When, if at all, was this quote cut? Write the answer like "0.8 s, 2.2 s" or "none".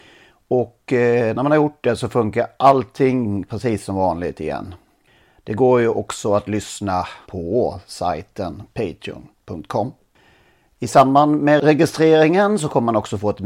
7.2 s